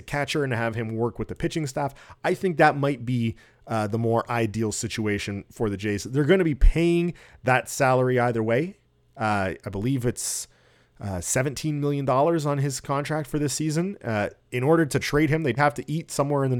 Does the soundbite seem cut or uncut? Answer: cut